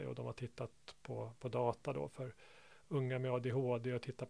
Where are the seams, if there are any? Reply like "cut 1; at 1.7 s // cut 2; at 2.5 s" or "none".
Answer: none